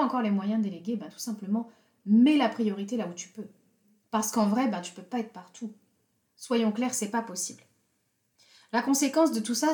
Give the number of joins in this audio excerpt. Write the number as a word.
zero